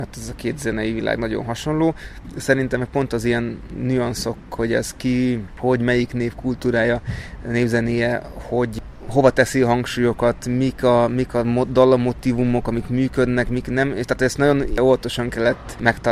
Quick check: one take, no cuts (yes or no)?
yes